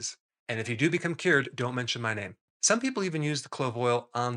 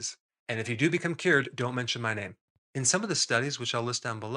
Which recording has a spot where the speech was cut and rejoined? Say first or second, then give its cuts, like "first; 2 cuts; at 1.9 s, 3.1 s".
second; 1 cut; at 2.5 s